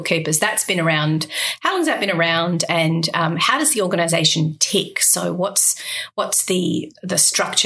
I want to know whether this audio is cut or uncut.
uncut